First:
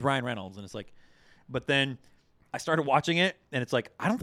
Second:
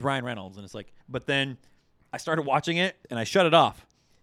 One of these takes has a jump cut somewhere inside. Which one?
second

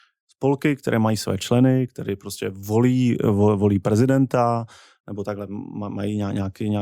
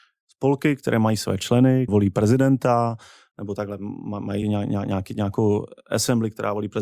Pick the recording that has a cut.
second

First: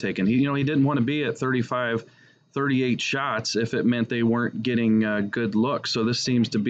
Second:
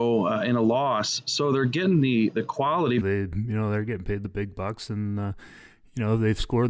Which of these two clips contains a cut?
second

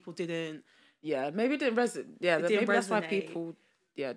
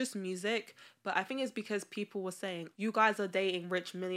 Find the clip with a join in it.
second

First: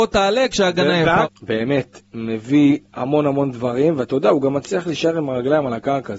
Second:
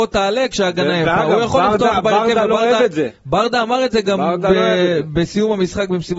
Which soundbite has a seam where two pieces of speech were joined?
first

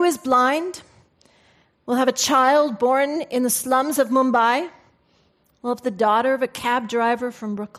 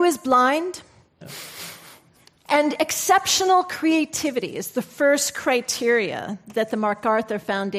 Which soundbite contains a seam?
second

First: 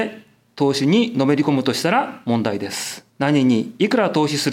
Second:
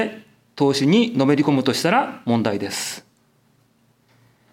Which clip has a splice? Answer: first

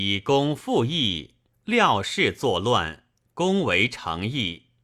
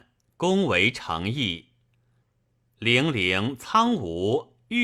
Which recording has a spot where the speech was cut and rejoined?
first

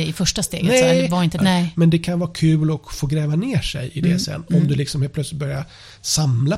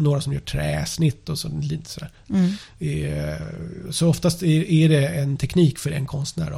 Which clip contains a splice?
first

